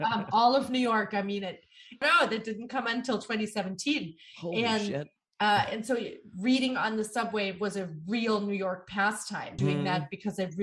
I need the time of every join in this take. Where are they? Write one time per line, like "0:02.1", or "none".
0:02.0
0:09.6